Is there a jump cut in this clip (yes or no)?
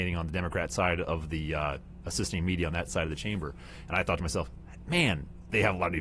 yes